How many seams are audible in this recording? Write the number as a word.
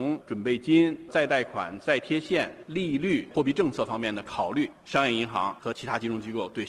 zero